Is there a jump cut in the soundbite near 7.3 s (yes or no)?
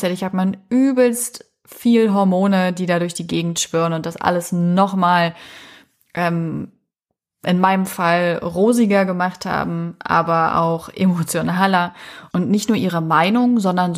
no